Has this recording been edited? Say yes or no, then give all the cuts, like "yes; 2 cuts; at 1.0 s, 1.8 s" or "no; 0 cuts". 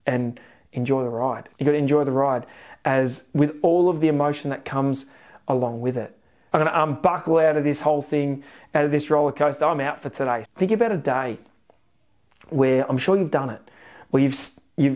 yes; 3 cuts; at 1.5 s, 6.5 s, 10.4 s